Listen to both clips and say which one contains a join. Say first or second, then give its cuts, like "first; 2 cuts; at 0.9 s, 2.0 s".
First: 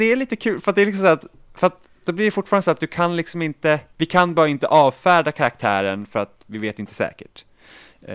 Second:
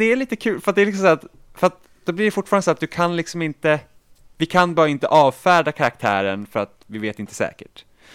first; 1 cut; at 3.9 s